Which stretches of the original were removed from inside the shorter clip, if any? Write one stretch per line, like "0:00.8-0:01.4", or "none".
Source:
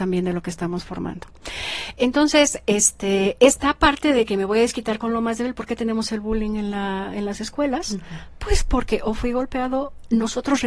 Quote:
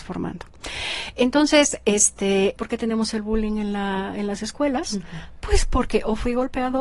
0:03.4-0:05.5